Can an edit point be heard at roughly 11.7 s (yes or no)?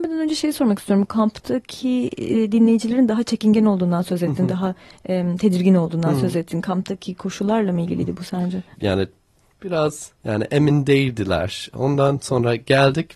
no